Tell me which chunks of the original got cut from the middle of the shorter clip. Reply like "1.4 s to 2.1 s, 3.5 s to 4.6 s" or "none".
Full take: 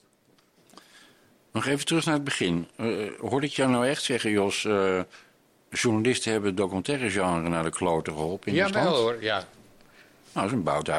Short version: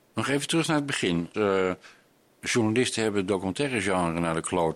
2.7 s to 4.6 s